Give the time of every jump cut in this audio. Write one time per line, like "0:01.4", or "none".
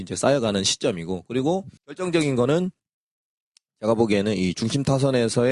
0:01.8